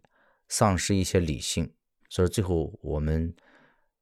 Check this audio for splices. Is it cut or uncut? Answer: cut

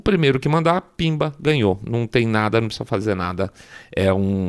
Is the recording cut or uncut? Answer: uncut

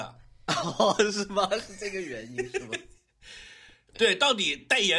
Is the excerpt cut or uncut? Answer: uncut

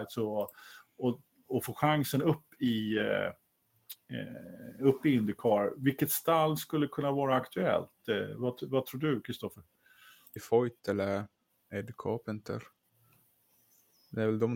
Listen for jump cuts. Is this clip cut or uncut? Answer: cut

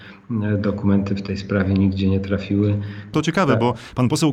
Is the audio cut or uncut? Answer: cut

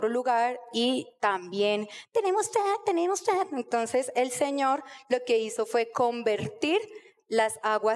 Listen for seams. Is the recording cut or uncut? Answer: uncut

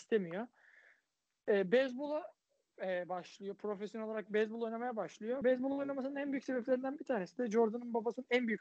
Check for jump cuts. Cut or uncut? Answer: uncut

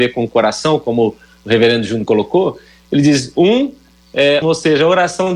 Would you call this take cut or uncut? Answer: cut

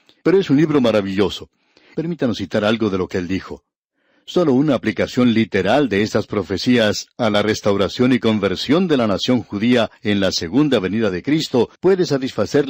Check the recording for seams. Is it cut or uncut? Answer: cut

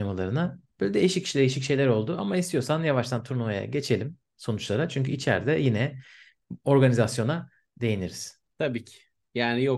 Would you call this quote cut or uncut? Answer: uncut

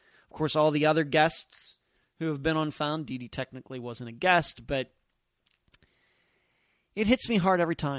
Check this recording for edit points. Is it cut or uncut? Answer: uncut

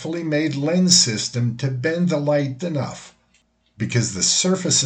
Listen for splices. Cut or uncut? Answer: cut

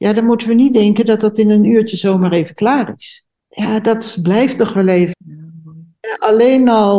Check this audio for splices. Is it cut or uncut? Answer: cut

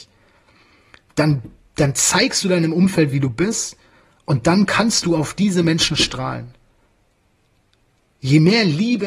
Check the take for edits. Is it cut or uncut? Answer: uncut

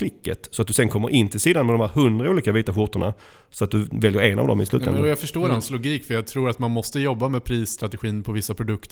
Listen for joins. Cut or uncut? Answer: uncut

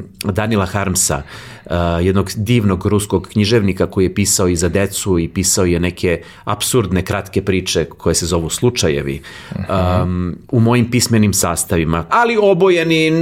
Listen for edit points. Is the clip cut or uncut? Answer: cut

